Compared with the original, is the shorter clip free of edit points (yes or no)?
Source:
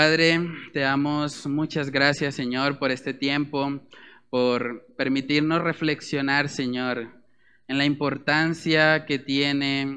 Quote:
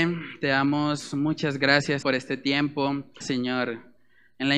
no